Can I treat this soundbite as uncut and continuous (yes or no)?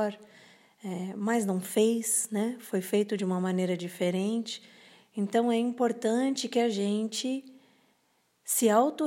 yes